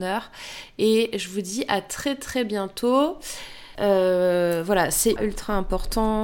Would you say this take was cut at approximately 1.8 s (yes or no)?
no